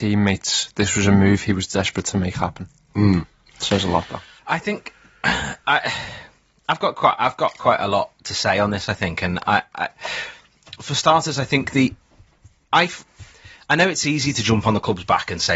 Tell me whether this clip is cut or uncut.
uncut